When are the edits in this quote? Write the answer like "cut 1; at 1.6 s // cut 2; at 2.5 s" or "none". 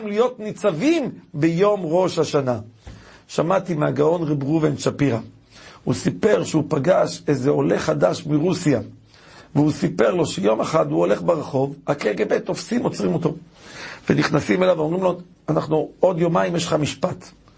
none